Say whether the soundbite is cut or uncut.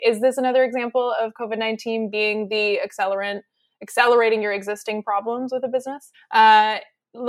cut